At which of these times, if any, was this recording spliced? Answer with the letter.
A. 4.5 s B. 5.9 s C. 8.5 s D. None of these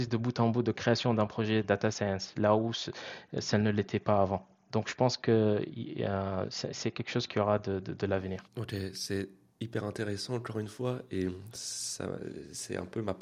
C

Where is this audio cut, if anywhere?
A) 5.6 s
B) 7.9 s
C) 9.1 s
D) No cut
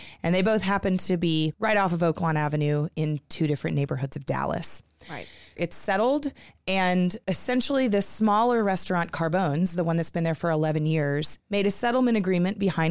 A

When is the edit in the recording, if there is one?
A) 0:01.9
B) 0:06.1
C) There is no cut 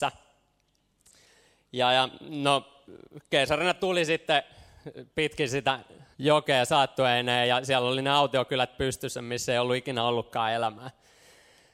B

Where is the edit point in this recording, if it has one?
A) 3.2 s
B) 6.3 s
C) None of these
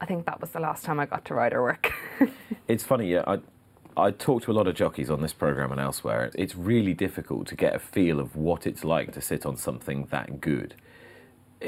B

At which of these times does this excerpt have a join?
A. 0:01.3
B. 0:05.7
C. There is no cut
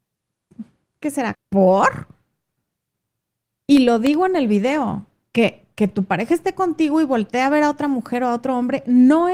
A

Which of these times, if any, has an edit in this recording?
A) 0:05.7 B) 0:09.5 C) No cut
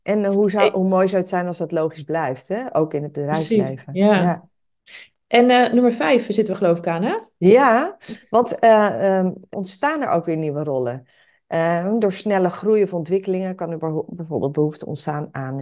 B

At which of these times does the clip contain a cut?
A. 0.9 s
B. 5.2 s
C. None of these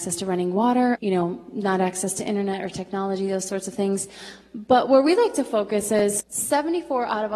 A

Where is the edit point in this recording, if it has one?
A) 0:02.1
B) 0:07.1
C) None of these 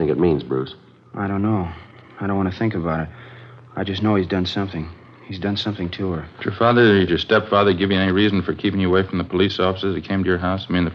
B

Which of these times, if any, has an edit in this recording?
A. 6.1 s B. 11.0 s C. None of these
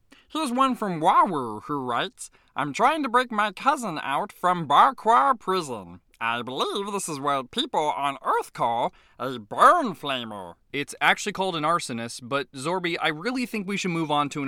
A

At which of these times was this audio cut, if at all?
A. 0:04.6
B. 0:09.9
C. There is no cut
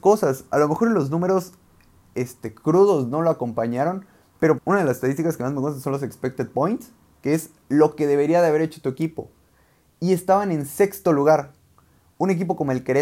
A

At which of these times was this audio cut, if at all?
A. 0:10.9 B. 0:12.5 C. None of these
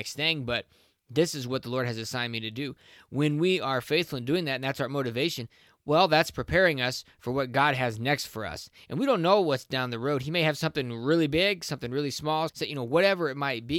B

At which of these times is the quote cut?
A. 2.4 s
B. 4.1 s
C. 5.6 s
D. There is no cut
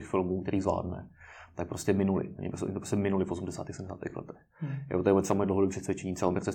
D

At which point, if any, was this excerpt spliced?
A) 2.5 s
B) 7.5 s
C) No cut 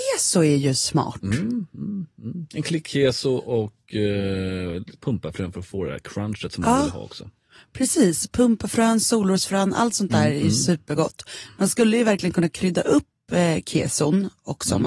C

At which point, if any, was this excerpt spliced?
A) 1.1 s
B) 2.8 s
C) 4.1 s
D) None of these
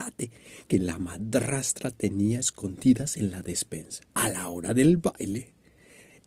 C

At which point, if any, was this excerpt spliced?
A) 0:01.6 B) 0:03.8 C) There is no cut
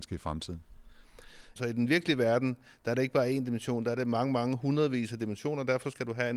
A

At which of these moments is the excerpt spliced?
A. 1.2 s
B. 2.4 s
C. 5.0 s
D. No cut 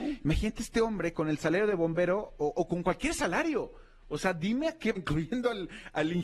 C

